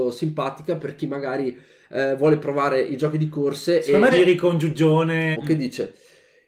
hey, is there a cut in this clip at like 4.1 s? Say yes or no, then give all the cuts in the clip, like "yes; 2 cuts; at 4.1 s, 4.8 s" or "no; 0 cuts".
yes; 2 cuts; at 4.1 s, 5.3 s